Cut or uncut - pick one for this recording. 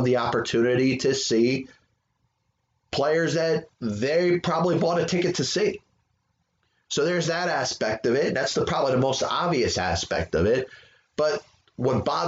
cut